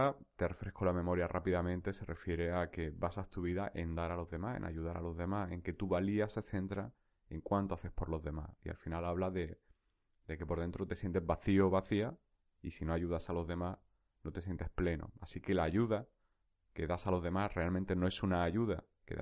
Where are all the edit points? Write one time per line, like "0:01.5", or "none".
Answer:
none